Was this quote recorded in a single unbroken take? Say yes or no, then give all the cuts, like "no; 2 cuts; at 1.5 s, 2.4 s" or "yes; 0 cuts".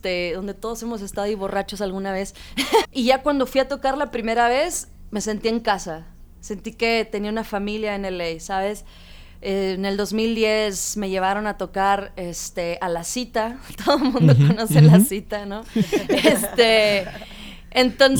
no; 1 cut; at 2.8 s